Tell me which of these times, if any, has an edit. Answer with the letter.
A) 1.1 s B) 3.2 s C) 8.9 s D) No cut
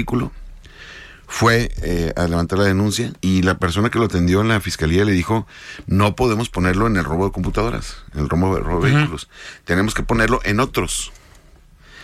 B